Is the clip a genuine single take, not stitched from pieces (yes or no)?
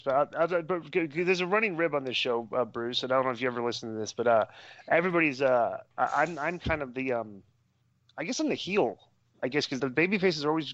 no